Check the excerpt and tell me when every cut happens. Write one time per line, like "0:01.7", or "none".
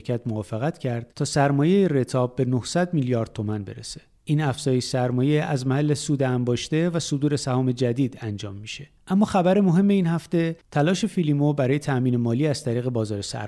0:01.1